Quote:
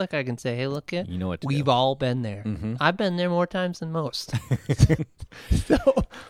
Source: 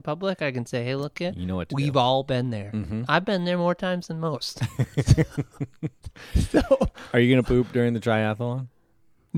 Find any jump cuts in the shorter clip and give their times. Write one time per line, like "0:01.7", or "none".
0:05.0